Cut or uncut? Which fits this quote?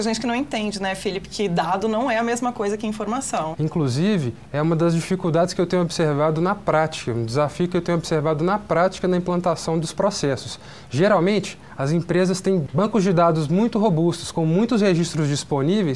cut